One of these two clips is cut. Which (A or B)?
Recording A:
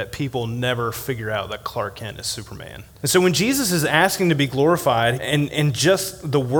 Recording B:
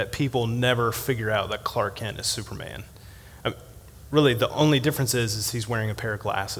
A